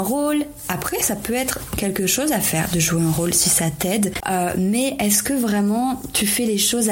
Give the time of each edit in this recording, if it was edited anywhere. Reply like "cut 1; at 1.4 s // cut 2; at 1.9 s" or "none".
cut 1; at 4.2 s